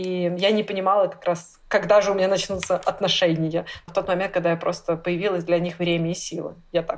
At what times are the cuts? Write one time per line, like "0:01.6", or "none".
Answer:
0:03.9